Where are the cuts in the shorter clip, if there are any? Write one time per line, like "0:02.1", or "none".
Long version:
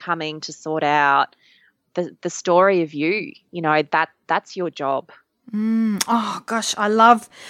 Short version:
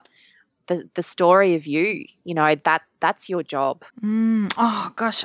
0:03.9